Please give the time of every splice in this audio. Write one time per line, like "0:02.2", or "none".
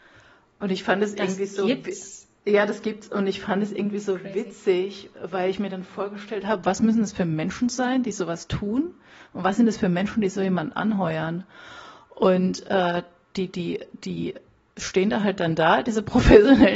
none